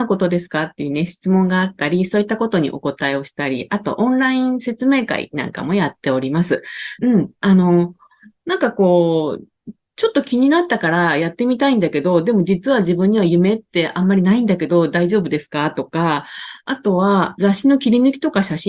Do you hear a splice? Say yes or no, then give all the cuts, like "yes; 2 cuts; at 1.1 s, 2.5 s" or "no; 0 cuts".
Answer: yes; 2 cuts; at 7.0 s, 17.4 s